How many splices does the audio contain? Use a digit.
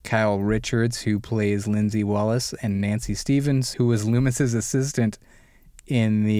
1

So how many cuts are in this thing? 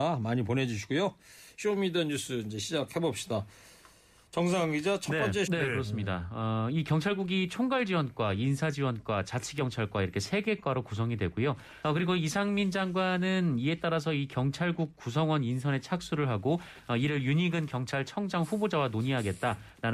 2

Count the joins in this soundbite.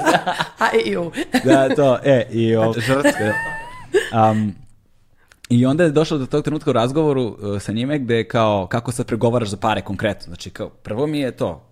1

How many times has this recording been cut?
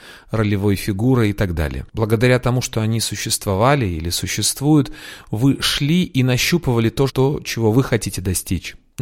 2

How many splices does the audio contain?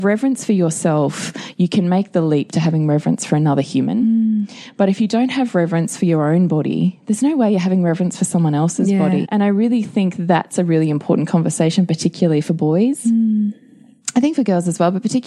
1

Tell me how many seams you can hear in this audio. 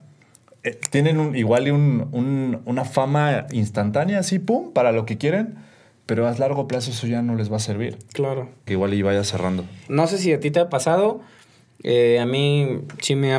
2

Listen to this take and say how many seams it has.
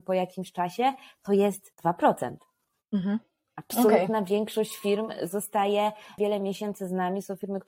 0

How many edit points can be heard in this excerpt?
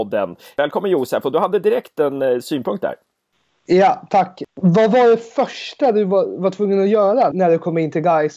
1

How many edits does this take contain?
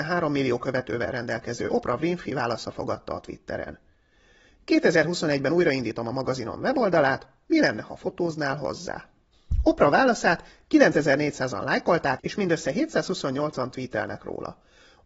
1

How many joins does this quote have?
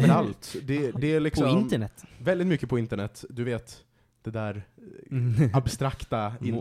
1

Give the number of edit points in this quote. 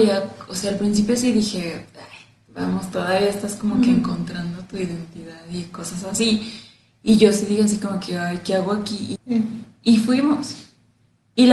1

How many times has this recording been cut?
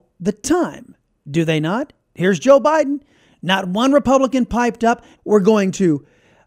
1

